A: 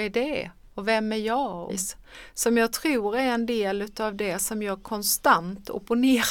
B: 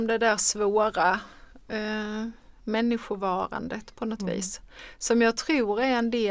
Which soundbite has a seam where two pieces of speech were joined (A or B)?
A